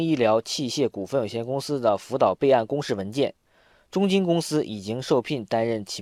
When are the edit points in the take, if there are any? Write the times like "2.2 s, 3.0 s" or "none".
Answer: none